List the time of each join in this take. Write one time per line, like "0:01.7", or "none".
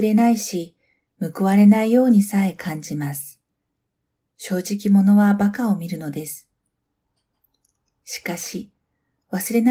none